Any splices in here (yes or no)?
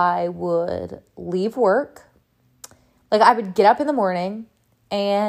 no